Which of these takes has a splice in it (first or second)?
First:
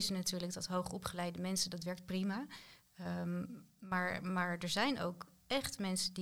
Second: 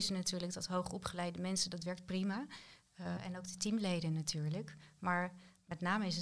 second